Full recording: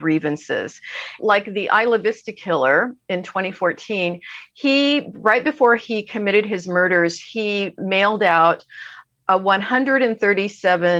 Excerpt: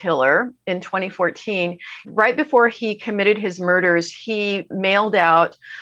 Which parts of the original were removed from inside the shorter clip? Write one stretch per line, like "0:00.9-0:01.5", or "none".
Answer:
0:04.5-0:05.1